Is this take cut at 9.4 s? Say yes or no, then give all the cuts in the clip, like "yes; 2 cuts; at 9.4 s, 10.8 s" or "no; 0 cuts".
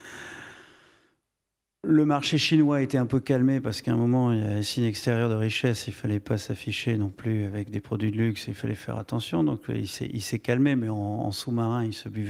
no; 0 cuts